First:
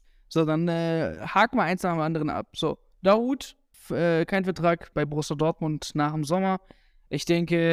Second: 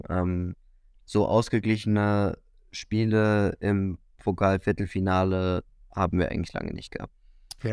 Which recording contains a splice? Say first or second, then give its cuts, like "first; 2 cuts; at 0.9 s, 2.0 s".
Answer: first; 2 cuts; at 3.7 s, 4.9 s